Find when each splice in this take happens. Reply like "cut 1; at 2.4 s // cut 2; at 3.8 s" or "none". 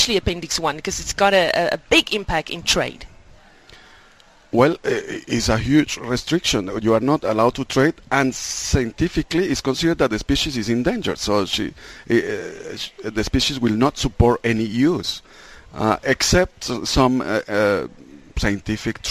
none